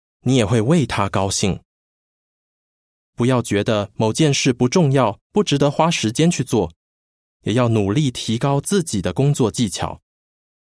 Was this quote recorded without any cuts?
no; 1 cut; at 3.1 s

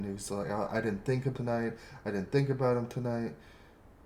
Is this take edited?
yes; 1 cut; at 1.4 s

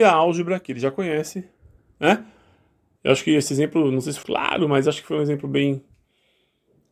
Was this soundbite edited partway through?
yes; 2 cuts; at 3.0 s, 4.2 s

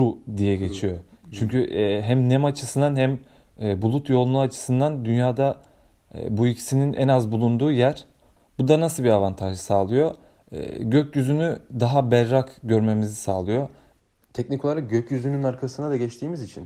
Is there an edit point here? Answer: no; 0 cuts

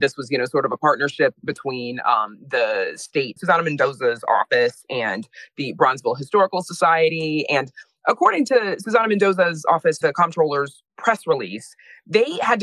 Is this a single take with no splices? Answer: no; 2 cuts; at 3.4 s, 10.0 s

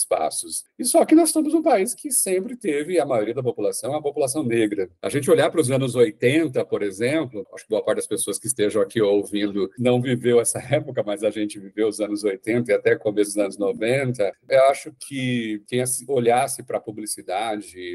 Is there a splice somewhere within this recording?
yes; 1 cut; at 5.0 s

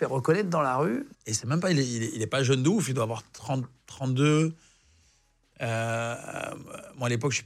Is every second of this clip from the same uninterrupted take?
no; 1 cut; at 1.1 s

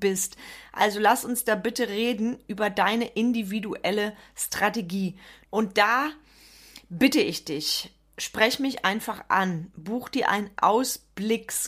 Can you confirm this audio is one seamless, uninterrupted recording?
no; 1 cut; at 5.4 s

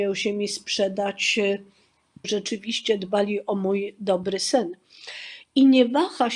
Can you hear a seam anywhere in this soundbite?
yes; 1 cut; at 2.2 s

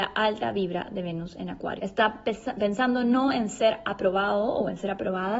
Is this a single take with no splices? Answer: no; 1 cut; at 1.8 s

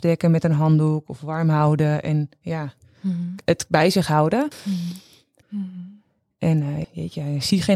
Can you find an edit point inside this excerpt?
yes; 2 cuts; at 5.4 s, 6.8 s

